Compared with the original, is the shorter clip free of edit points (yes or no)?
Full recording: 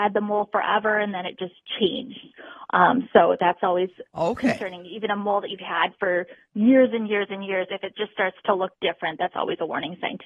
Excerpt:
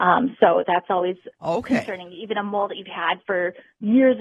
yes